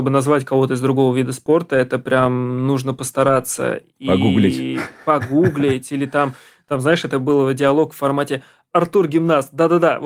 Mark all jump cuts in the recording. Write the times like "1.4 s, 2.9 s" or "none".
none